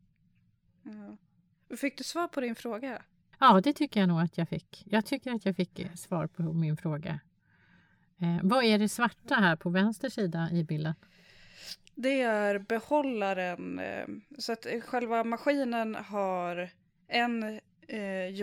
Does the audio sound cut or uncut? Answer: uncut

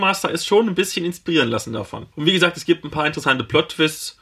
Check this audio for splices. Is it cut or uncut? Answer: cut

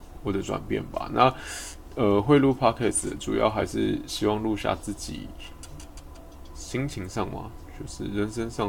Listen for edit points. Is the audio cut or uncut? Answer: uncut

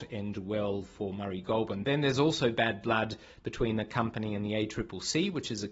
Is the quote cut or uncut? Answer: uncut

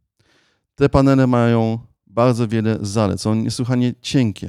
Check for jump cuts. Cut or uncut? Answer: uncut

